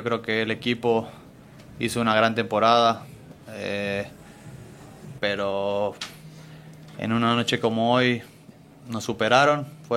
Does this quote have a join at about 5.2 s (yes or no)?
yes